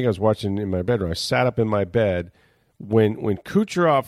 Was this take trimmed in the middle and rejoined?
no; 0 cuts

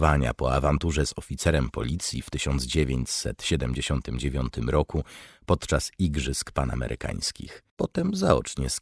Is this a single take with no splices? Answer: no; 1 cut; at 7.7 s

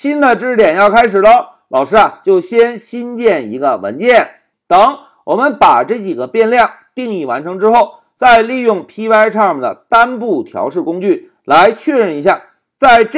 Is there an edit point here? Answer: yes; 1 cut; at 4.5 s

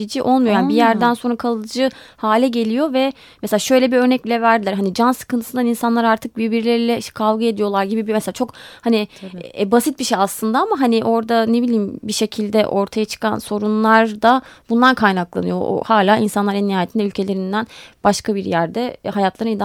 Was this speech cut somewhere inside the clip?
no; 0 cuts

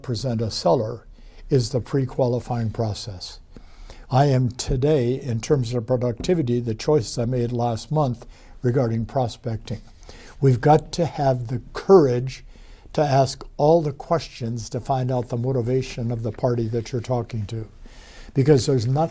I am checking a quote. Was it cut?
yes; 2 cuts; at 4.0 s, 10.3 s

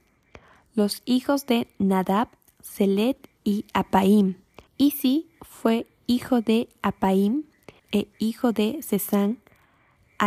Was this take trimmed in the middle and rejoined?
yes; 2 cuts; at 4.7 s, 7.8 s

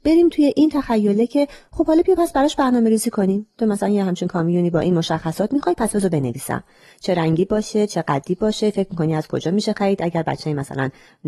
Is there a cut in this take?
no; 0 cuts

